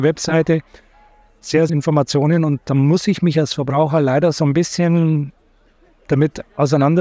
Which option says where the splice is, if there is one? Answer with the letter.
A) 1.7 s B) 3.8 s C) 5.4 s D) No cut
A